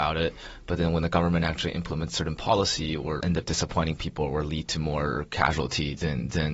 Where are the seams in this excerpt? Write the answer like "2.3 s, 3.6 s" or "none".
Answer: 3.2 s